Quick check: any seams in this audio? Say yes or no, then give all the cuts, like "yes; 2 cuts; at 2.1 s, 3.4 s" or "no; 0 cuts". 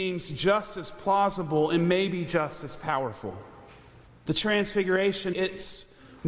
yes; 2 cuts; at 4.1 s, 5.3 s